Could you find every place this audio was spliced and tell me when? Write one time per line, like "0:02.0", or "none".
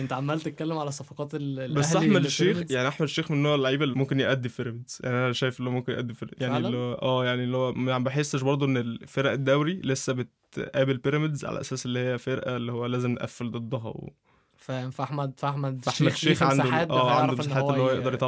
0:03.9